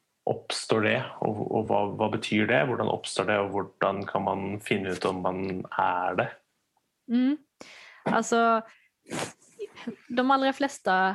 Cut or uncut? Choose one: uncut